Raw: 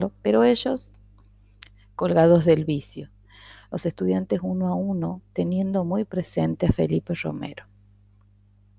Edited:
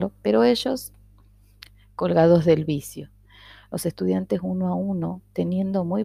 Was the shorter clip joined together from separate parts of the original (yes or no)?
no